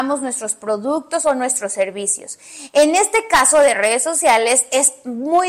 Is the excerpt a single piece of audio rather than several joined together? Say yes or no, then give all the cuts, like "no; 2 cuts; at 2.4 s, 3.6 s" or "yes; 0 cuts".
yes; 0 cuts